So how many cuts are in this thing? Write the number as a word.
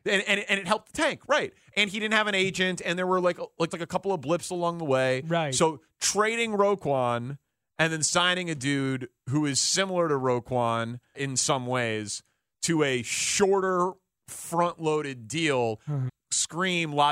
three